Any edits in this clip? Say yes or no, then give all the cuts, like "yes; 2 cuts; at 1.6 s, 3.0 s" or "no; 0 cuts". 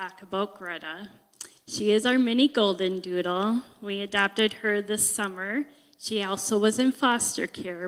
no; 0 cuts